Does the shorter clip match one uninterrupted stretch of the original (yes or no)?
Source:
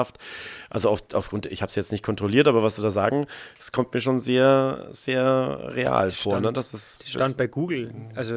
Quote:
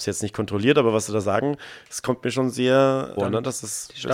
no